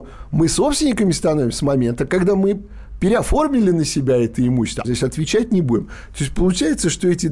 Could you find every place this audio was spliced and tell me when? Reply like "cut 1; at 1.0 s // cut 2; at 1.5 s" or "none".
cut 1; at 4.8 s